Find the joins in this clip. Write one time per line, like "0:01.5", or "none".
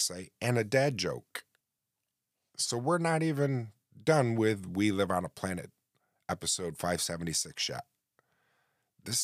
none